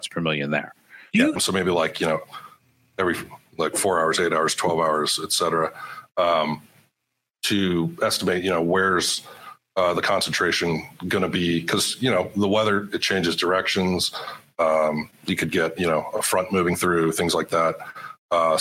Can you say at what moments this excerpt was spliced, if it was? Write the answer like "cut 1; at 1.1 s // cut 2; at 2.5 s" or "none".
cut 1; at 1.4 s